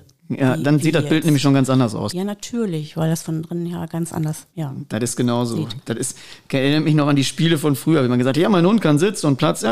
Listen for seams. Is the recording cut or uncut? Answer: cut